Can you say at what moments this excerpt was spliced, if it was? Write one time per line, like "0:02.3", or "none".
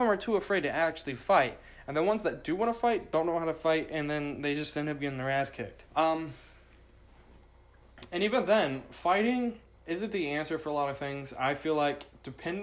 0:05.9